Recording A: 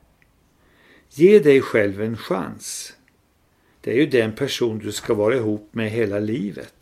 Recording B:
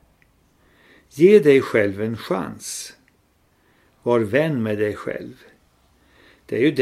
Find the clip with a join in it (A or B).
A